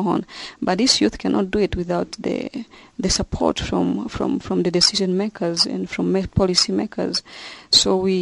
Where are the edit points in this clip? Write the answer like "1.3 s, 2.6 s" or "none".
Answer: none